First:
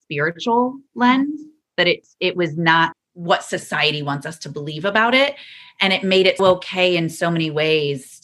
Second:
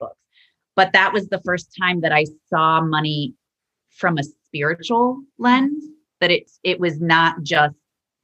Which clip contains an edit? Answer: first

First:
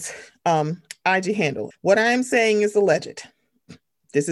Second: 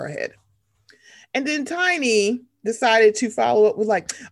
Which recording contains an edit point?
first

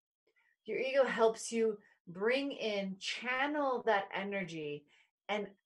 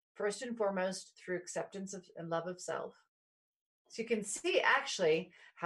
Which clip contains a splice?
second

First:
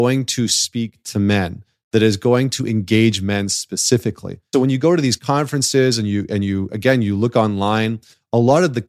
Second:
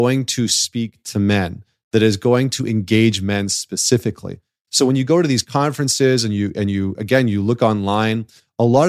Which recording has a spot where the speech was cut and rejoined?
first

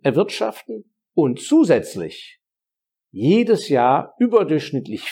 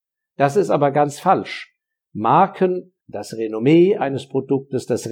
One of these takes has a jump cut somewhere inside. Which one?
second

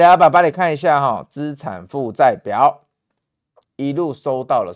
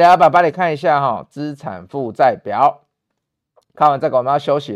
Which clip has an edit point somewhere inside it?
first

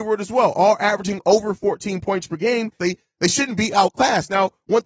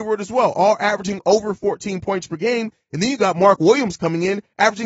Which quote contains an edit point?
first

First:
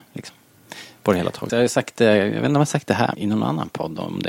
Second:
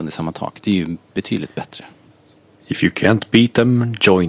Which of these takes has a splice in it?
first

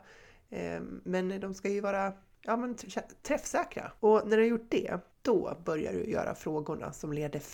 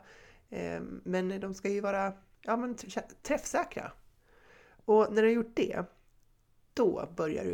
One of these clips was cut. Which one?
first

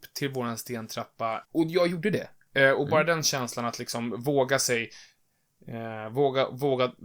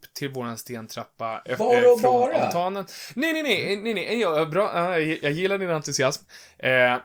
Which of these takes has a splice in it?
first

